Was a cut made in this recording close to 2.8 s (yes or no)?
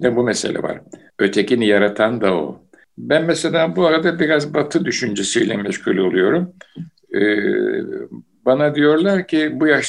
yes